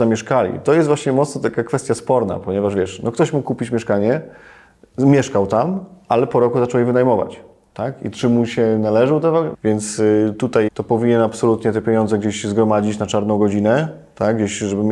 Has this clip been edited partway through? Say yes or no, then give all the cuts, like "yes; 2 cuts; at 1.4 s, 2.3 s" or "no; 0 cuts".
yes; 2 cuts; at 9.5 s, 10.7 s